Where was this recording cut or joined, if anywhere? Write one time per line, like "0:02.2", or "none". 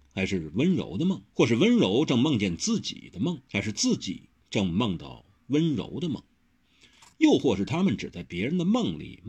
0:01.3
0:03.5